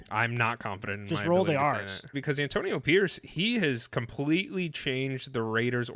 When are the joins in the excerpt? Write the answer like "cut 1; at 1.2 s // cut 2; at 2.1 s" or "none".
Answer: cut 1; at 2.1 s